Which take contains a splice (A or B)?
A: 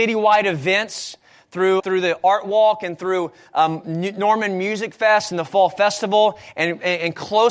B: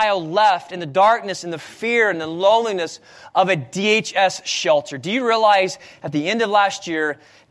A